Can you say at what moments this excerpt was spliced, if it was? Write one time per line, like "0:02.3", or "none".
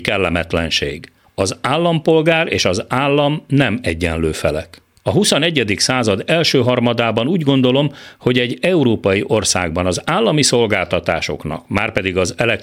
none